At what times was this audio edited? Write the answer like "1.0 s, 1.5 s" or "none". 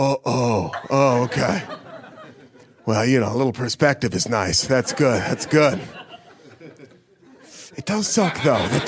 none

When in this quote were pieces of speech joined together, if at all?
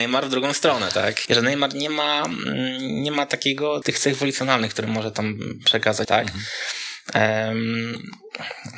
1.3 s, 3.8 s, 6.0 s

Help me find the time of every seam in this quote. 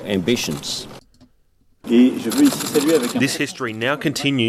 1.8 s

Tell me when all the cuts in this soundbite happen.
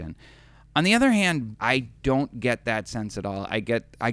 1.5 s

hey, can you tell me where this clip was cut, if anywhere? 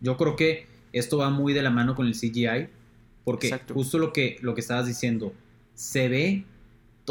none

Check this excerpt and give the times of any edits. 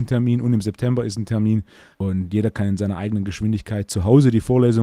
1.9 s

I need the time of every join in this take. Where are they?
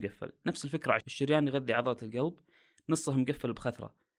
1.0 s

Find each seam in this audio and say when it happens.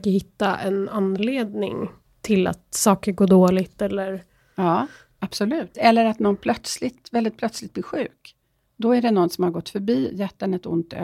5.7 s

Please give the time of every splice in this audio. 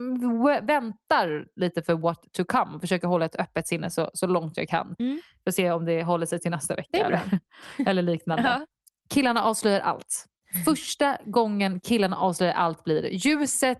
none

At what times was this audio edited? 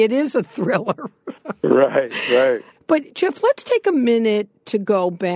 none

